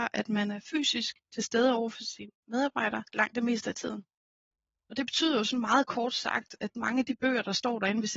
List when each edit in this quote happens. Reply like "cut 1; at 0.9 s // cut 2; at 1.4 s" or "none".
none